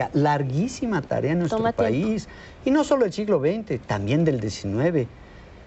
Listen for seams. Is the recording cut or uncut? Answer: uncut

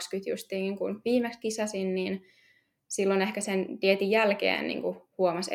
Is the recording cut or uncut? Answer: uncut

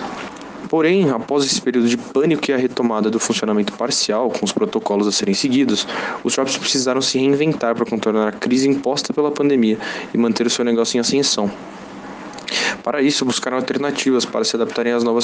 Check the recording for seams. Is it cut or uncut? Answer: uncut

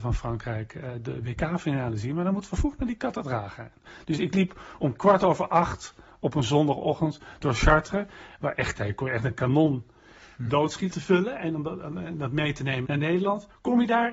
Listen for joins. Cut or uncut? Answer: cut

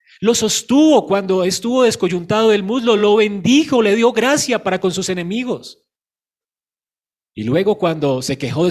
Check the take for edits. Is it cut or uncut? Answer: uncut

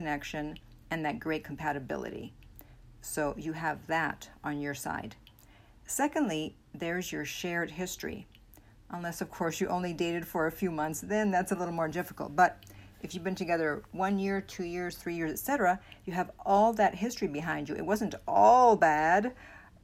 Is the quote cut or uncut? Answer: uncut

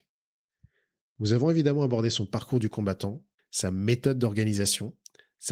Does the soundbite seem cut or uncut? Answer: cut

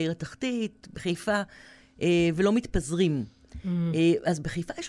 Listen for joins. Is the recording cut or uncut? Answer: uncut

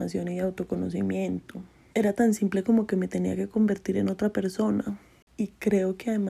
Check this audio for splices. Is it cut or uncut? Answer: cut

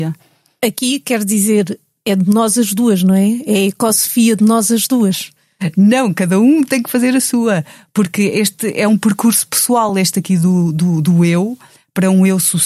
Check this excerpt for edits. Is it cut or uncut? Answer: uncut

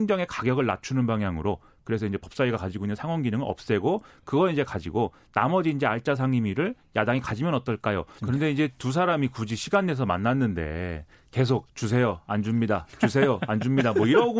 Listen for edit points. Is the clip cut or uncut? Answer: cut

